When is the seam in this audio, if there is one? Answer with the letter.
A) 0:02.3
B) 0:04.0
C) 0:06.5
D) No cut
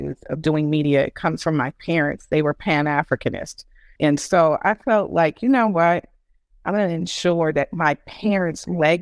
B